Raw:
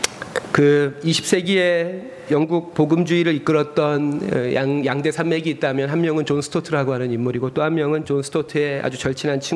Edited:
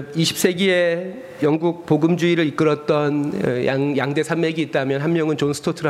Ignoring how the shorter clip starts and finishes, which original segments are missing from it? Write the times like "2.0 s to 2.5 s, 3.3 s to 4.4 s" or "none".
none

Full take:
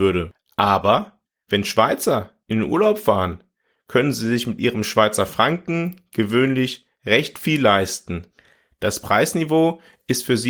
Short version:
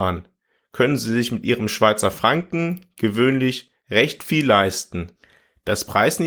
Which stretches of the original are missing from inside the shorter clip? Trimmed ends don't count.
none

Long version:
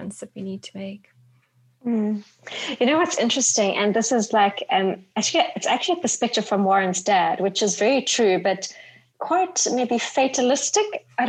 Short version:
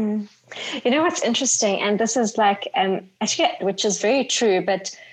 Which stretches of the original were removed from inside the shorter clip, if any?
5.5 s to 7.4 s

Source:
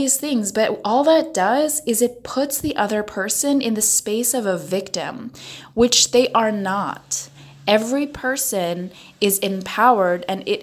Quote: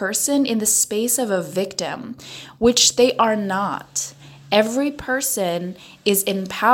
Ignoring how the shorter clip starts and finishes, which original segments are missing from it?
none

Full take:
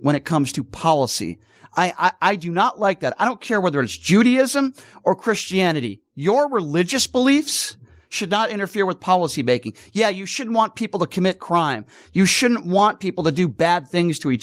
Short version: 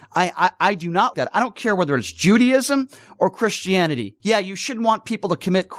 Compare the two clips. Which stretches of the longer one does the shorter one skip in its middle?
2.7 s to 3.0 s, 6.1 s to 9.9 s

